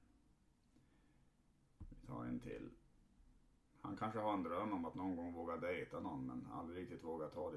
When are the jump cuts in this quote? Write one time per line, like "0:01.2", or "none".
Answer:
0:03.6